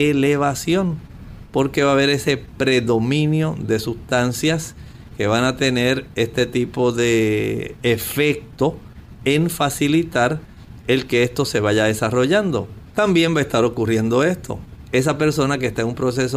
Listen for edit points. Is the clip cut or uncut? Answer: cut